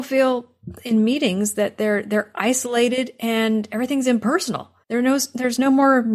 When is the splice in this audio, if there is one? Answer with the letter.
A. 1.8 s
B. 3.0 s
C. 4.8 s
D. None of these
C